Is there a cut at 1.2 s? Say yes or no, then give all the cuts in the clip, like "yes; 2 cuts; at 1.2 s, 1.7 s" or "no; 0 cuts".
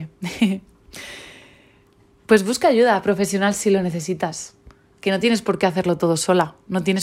no; 0 cuts